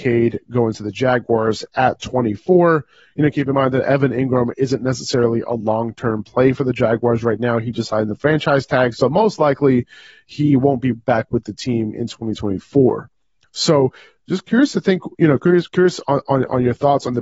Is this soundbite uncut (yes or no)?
yes